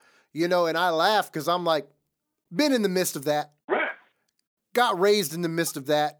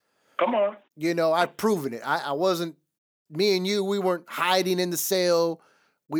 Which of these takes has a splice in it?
first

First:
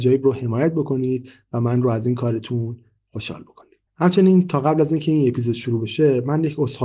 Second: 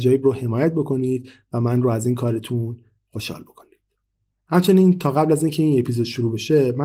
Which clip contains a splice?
first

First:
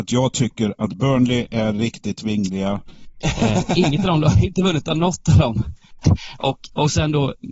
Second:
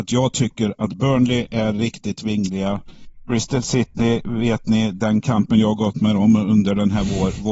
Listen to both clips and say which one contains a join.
first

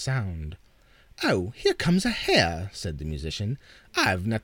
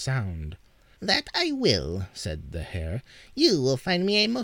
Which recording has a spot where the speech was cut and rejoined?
second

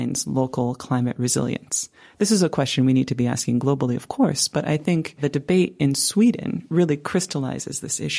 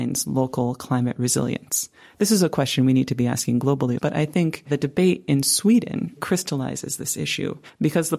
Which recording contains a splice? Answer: second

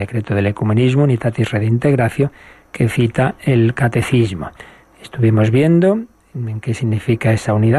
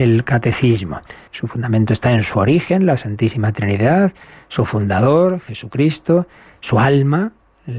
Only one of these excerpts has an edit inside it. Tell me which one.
second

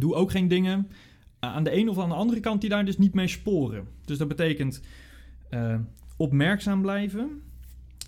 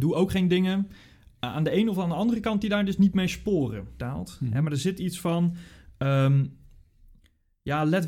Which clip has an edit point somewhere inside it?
second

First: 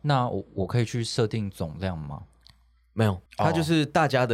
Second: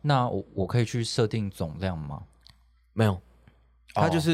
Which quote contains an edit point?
first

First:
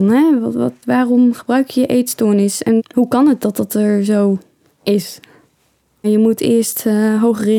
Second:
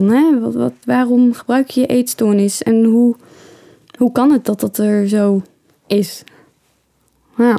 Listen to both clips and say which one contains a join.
first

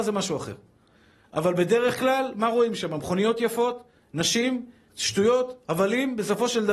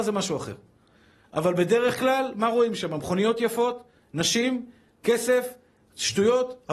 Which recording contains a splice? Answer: first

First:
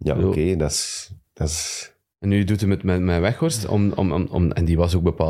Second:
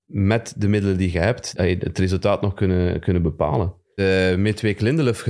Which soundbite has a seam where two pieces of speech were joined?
second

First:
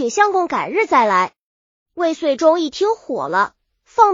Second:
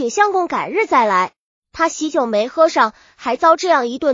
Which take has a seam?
second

